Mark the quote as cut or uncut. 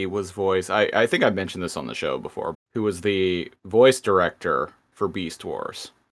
cut